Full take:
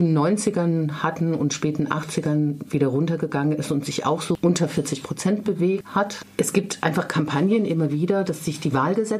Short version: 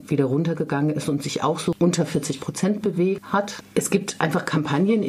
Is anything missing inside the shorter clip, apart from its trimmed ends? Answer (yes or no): no